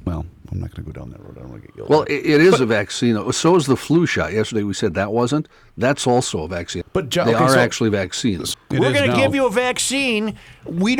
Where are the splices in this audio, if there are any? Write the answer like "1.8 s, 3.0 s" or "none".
6.8 s, 8.5 s

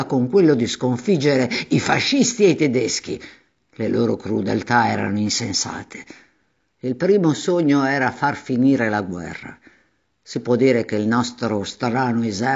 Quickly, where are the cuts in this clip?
6.7 s

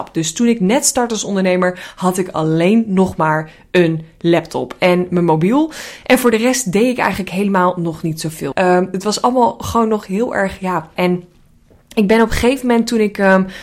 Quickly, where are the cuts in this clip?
8.5 s, 11.0 s

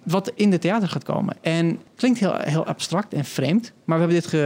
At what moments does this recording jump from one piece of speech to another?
1.9 s

